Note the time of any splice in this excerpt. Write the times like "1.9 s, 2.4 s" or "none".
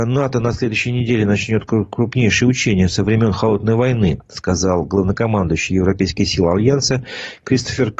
none